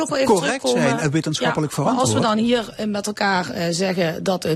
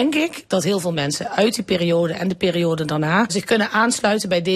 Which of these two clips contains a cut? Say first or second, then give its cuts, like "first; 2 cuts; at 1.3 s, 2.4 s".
second; 1 cut; at 3.3 s